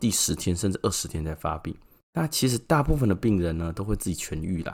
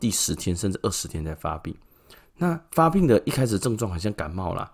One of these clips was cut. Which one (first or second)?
first